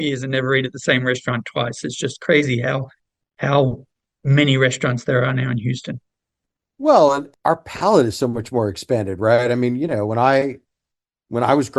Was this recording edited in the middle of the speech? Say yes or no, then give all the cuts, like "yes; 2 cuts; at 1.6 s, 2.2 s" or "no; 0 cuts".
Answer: no; 0 cuts